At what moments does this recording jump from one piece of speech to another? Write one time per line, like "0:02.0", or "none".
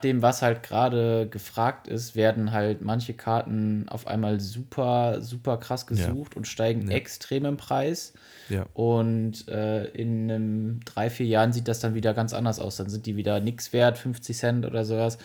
none